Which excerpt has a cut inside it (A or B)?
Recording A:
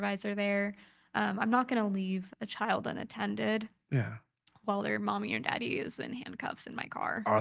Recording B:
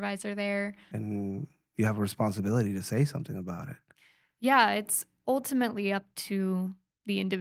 B